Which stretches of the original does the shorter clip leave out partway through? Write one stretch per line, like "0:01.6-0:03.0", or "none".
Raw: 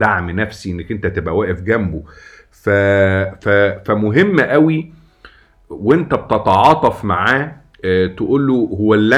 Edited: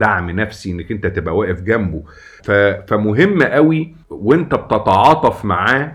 0:02.4-0:03.4
0:05.0-0:05.6